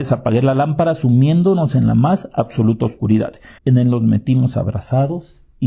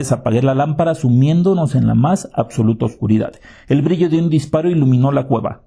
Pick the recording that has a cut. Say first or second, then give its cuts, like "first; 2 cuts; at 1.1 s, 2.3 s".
first; 1 cut; at 3.6 s